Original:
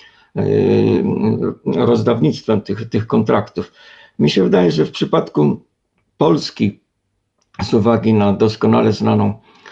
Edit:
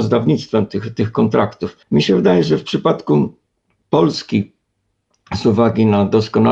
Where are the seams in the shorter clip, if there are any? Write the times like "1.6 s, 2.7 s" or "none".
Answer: 1.8 s